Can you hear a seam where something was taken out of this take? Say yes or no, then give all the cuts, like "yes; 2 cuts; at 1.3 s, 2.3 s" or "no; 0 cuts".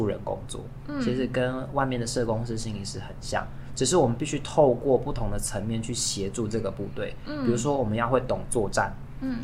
no; 0 cuts